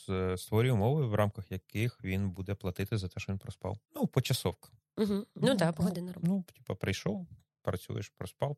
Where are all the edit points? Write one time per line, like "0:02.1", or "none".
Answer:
0:03.8